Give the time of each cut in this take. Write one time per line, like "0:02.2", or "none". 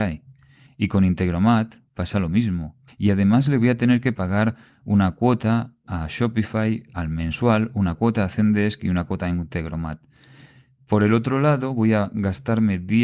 0:02.9